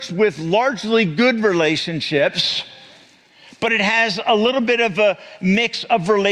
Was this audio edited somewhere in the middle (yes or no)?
no